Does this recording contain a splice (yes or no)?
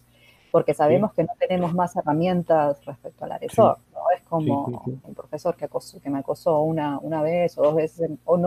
yes